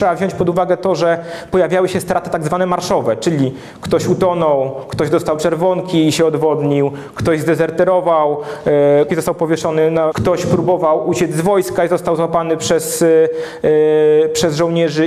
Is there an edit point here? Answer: yes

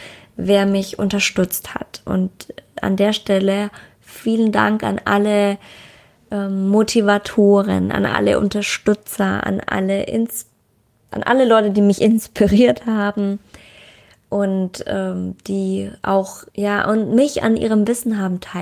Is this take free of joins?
no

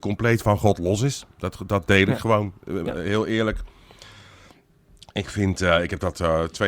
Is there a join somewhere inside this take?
no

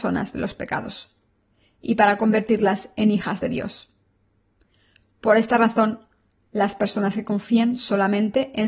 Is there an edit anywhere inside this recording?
no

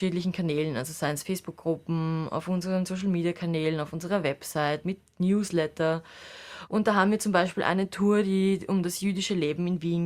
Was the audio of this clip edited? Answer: yes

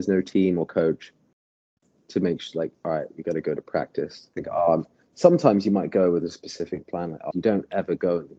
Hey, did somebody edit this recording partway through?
yes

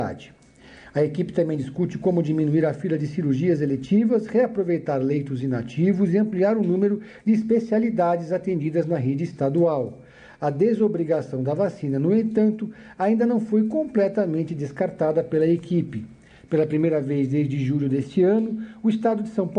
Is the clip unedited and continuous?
yes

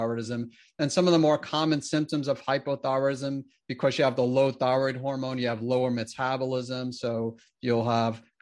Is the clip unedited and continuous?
yes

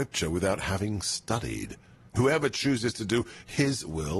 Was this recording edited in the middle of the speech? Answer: yes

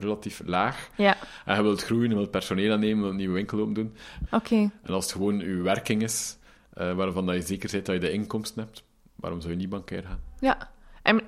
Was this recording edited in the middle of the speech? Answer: yes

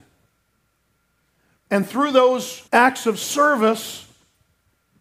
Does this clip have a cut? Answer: yes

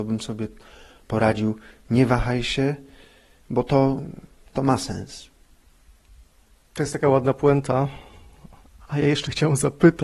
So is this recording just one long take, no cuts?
yes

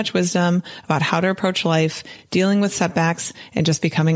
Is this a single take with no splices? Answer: yes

